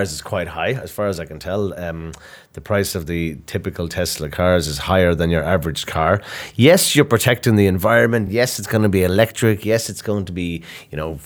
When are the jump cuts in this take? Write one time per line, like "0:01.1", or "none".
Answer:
none